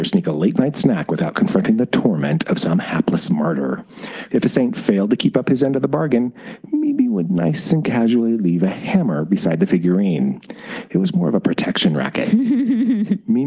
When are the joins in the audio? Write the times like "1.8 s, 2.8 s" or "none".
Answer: 4.3 s, 10.9 s